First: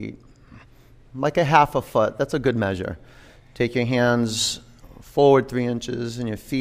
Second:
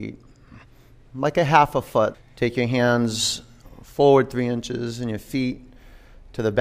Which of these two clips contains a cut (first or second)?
second